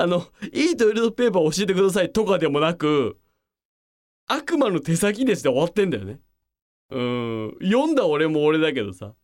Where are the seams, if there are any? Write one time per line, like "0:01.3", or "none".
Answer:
none